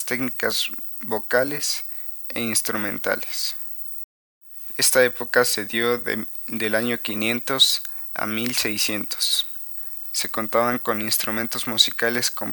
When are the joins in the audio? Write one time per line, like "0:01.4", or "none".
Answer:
0:04.7
0:10.0